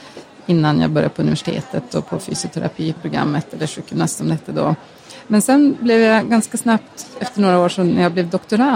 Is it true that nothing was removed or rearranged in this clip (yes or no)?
yes